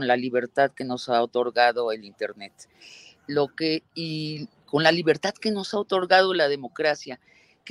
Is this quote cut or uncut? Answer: uncut